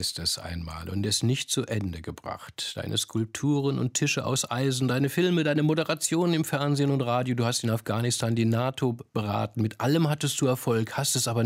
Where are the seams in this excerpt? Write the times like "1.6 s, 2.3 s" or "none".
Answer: none